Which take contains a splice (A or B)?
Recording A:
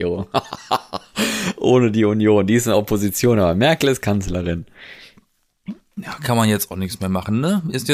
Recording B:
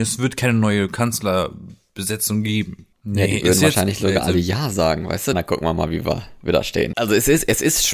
B